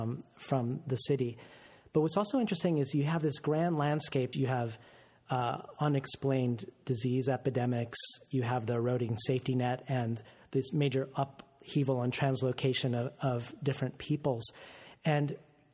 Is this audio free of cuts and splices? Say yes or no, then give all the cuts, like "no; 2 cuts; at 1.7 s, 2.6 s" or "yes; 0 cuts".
no; 1 cut; at 4.3 s